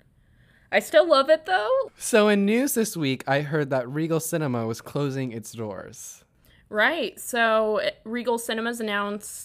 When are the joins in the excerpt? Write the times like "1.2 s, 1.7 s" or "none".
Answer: 1.9 s